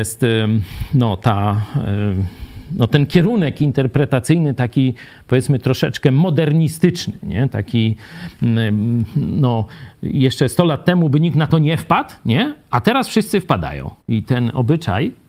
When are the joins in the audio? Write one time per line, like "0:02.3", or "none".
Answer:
0:14.0